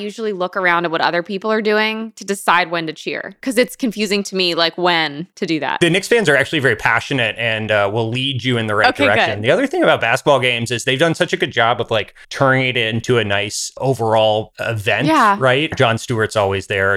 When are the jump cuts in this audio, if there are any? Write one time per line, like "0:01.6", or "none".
0:12.2
0:15.7